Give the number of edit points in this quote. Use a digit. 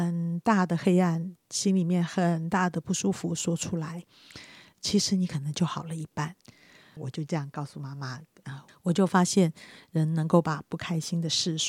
2